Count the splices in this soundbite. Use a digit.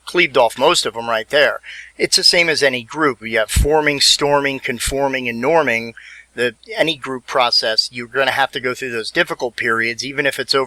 1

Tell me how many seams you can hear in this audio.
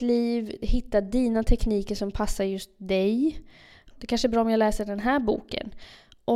1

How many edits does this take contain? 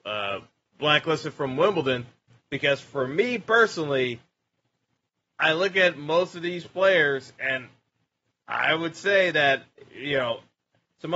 1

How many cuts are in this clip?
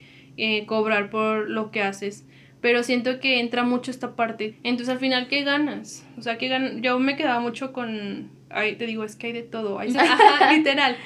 2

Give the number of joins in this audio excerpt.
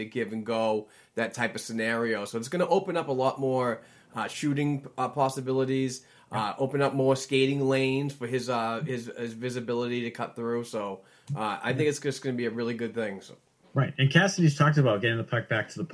0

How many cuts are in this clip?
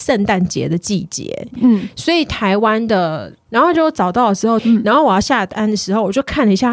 2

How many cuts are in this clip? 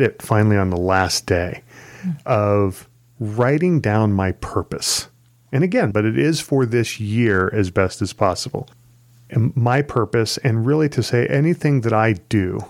1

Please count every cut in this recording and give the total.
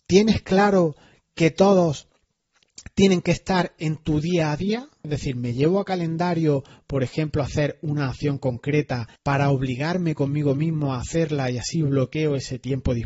2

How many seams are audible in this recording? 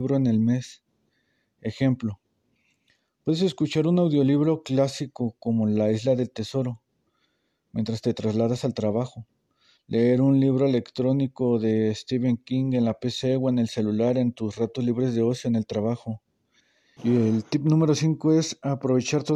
1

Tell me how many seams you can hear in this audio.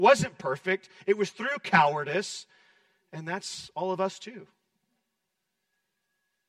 0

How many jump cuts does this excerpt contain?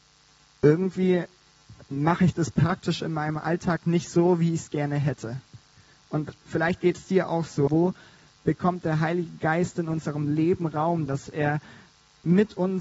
2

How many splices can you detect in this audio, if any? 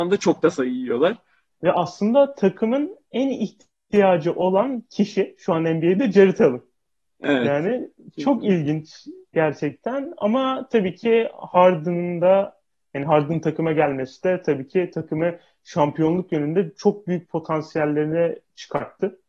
1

